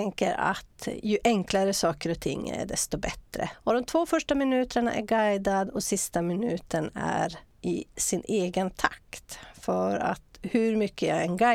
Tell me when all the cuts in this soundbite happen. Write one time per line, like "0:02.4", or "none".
0:03.5